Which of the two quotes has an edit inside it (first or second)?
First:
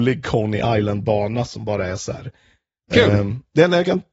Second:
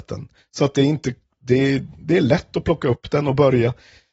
first